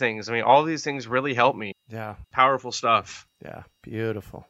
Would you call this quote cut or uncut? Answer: uncut